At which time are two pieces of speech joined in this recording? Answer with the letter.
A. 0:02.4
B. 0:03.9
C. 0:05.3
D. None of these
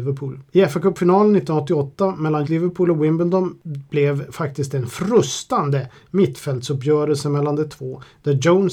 A